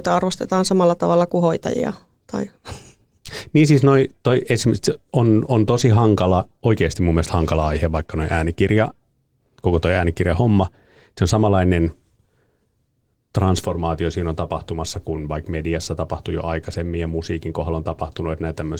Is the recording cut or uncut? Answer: uncut